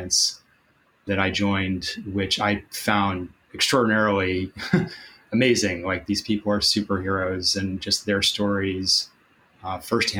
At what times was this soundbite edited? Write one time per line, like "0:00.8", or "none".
none